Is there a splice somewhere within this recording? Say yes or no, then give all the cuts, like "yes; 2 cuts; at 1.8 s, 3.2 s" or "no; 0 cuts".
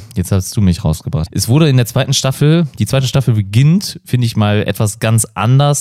yes; 1 cut; at 1.3 s